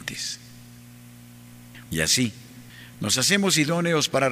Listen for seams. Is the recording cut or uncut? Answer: cut